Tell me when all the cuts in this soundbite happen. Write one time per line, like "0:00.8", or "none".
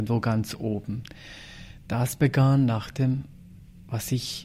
none